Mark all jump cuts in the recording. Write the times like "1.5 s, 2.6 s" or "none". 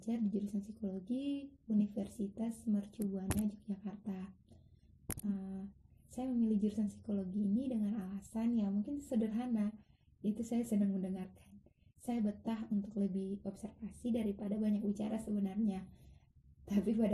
5.9 s